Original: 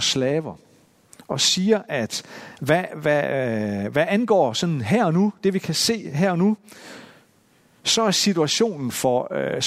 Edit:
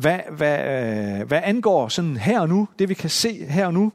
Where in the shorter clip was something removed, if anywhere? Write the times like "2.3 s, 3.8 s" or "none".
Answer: none